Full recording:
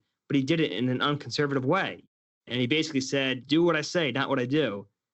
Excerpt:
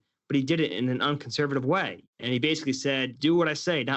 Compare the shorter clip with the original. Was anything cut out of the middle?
yes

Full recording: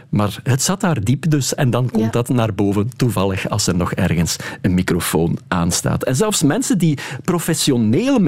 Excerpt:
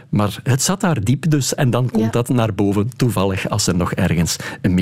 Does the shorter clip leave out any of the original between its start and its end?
no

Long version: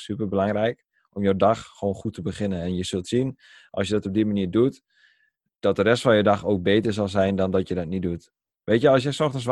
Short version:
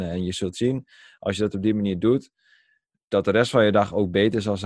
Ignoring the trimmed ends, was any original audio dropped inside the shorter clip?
no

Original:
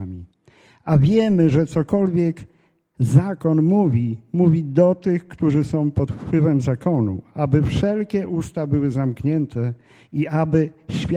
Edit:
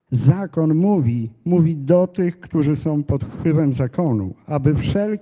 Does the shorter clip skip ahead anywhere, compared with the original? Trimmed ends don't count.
no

